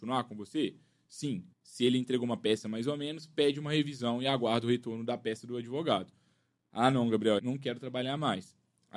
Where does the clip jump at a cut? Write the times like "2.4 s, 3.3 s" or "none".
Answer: 1.5 s, 7.4 s